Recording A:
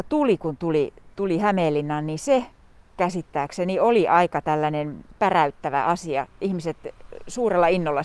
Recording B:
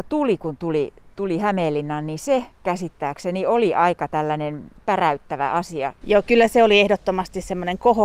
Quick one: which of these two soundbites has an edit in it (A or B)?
B